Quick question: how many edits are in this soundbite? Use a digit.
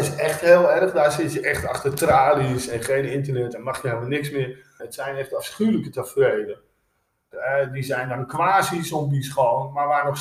2